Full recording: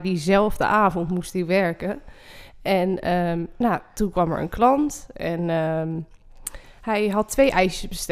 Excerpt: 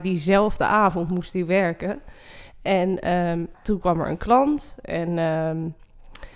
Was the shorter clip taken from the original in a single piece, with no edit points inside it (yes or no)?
no